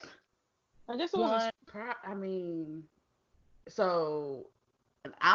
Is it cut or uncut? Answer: cut